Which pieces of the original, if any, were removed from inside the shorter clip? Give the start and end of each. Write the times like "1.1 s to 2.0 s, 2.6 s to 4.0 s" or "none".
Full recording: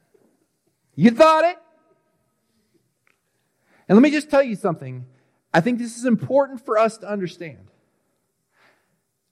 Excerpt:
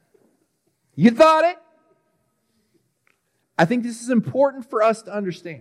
3.4 s to 5.4 s